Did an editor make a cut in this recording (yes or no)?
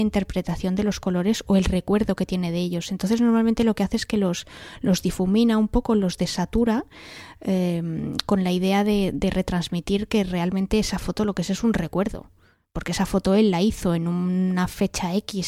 no